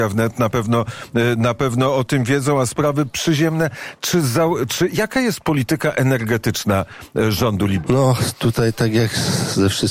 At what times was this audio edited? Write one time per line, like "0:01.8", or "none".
0:07.8